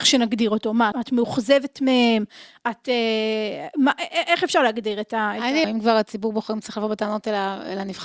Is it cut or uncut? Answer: cut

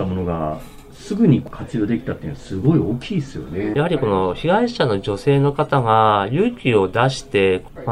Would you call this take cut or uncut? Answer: cut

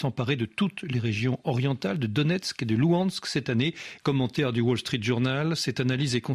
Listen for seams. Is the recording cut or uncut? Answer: cut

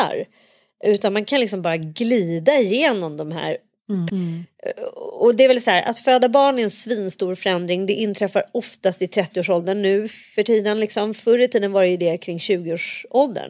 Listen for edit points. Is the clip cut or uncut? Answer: cut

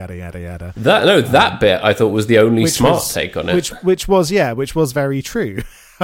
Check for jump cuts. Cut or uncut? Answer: uncut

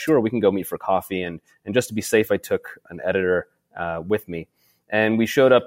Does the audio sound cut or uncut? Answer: uncut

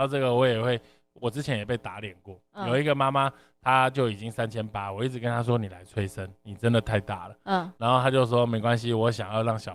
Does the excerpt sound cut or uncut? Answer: uncut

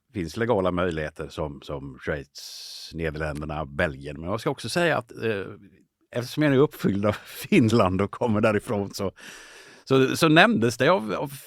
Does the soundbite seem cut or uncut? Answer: uncut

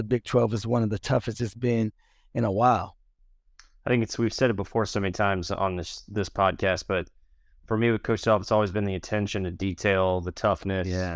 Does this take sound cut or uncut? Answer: uncut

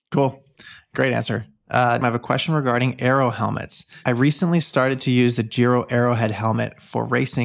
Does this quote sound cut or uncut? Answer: cut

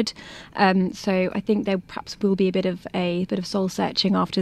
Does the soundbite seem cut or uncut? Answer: uncut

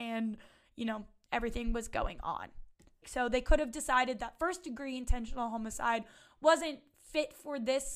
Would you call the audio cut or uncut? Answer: cut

